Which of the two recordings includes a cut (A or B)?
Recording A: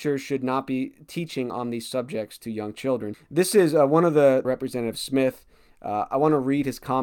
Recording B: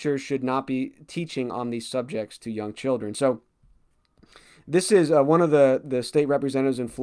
A